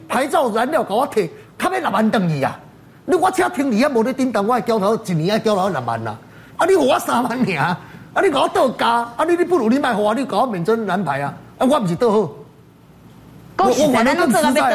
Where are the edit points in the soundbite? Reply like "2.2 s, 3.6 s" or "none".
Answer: none

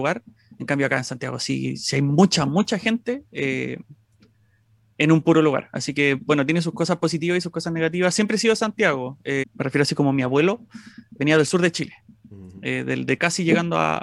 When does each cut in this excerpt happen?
9.4 s, 11.2 s

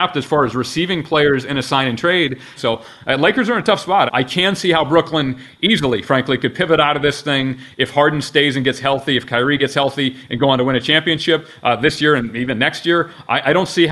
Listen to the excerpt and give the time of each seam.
2.6 s, 4.1 s

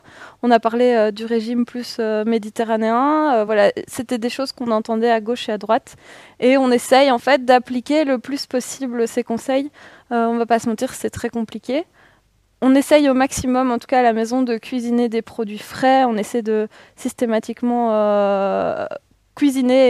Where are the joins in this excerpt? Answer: none

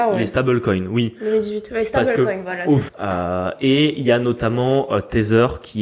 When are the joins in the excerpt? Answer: 2.9 s

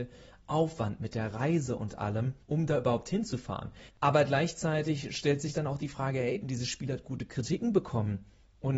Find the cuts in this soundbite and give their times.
2.4 s, 3.9 s, 6.4 s

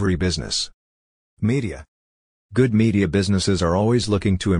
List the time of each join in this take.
none

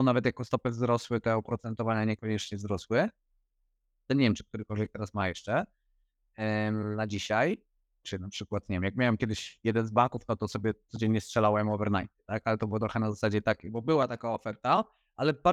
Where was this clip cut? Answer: 4.1 s, 8.0 s

